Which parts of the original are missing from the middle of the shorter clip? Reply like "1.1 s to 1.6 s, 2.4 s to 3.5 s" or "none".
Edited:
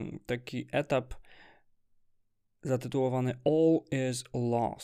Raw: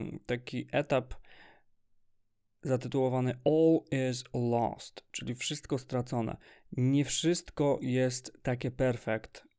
none